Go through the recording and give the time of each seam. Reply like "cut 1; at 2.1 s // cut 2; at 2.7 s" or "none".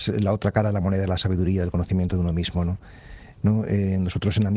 cut 1; at 3.4 s

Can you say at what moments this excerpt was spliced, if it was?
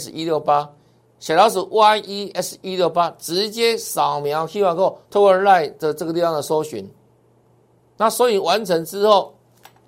cut 1; at 5.0 s

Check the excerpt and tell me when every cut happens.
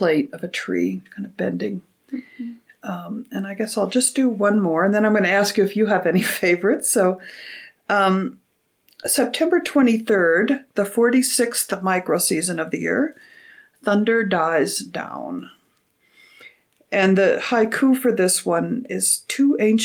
none

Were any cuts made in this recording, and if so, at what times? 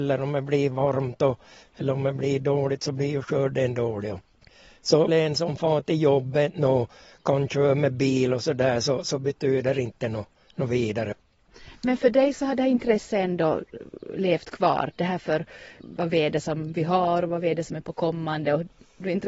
cut 1; at 5.1 s

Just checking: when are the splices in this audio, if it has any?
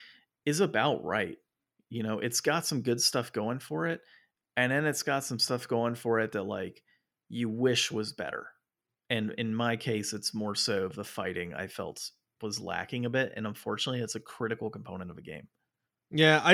none

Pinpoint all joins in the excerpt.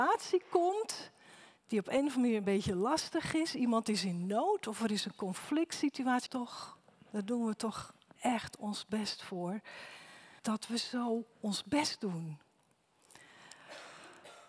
cut 1; at 6.3 s // cut 2; at 10.4 s

